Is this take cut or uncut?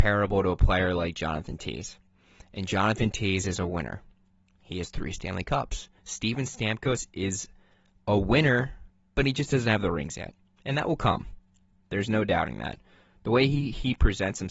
uncut